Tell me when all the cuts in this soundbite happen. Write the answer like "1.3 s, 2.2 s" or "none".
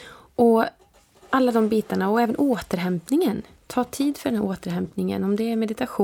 none

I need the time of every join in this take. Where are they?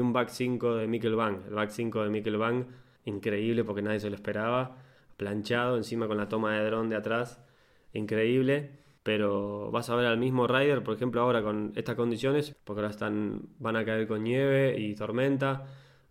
3.0 s, 9.0 s, 12.5 s

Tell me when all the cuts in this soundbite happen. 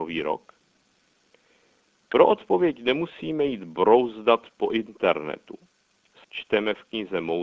6.2 s

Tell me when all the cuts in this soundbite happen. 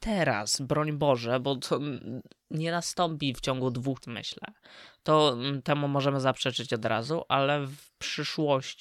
4.0 s

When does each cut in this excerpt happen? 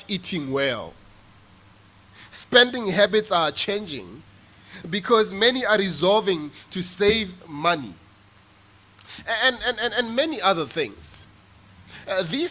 none

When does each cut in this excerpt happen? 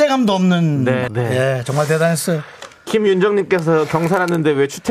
1.1 s

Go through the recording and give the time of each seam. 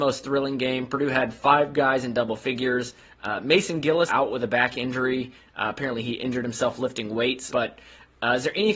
4.1 s, 7.5 s

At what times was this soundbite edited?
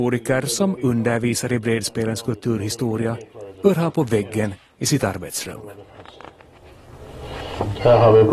none

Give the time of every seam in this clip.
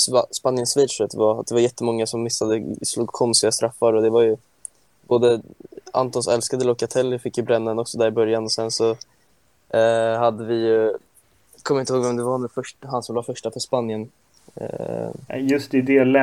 15.3 s

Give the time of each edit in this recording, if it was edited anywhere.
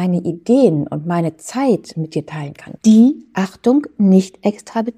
2.8 s

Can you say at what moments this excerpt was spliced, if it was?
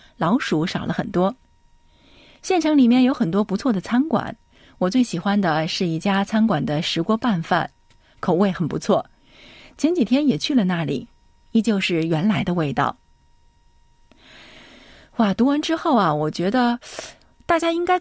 none

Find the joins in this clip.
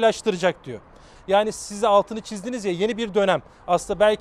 1.2 s

